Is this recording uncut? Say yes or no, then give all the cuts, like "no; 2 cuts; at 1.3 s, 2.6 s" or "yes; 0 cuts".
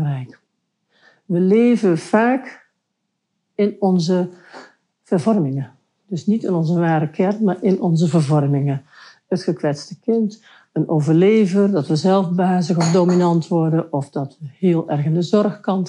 yes; 0 cuts